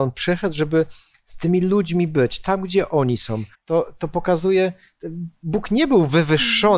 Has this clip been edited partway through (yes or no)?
yes